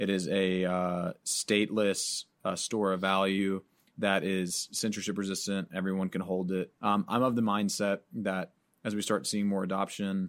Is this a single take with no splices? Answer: no; 1 cut; at 6.7 s

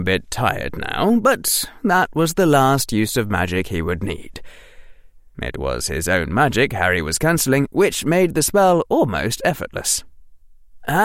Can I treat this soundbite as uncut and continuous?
no; 1 cut; at 5.3 s

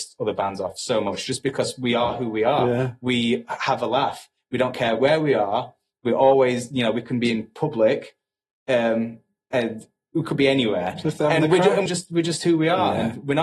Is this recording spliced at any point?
yes; 1 cut; at 11.9 s

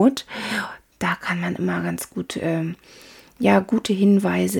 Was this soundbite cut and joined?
yes; 1 cut; at 0.9 s

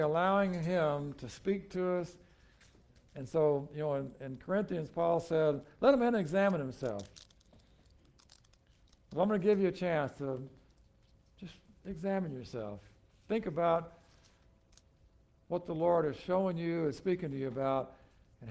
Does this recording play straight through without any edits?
yes; 0 cuts

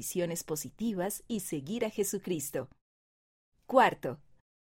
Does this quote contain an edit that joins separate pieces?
no; 0 cuts

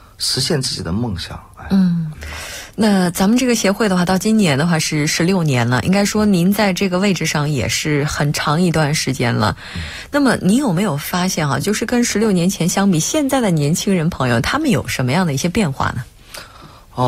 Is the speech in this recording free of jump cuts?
yes; 0 cuts

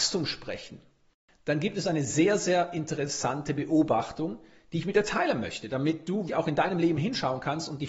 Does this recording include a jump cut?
yes; 1 cut; at 6.3 s

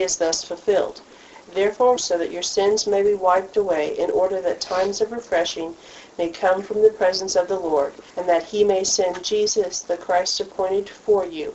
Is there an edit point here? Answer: yes; 2 cuts; at 2.0 s, 8.1 s

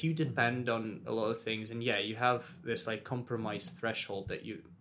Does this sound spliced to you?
no; 0 cuts

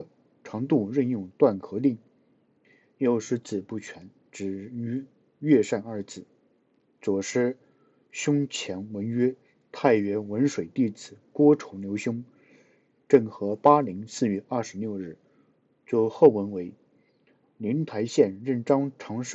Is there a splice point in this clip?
yes; 1 cut; at 6.9 s

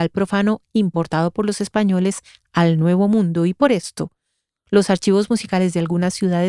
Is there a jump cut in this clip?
no; 0 cuts

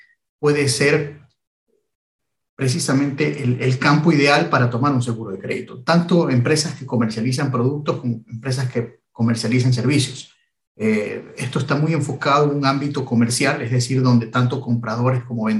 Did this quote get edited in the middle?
no; 0 cuts

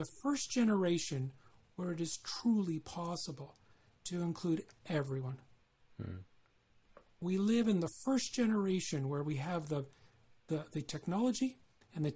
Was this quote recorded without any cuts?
yes; 0 cuts

